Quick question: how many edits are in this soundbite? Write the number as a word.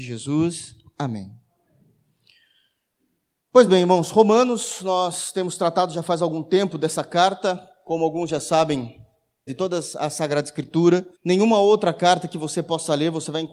two